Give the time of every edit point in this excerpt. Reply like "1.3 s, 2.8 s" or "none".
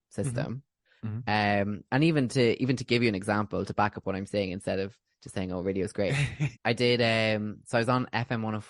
6.5 s